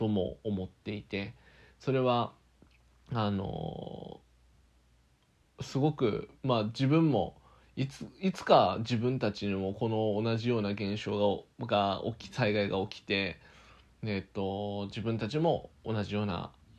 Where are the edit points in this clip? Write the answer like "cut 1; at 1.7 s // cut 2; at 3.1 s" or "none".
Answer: none